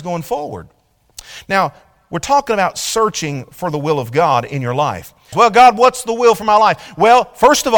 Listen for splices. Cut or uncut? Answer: cut